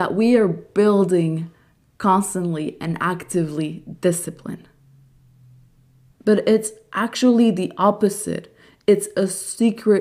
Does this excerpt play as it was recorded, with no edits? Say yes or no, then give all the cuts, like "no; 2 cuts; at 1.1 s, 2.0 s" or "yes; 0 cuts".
no; 1 cut; at 6.1 s